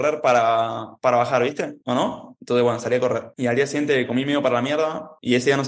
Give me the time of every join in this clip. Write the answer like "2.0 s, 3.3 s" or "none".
none